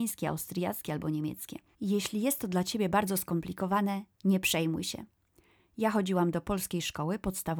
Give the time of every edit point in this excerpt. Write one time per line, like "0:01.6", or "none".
0:01.7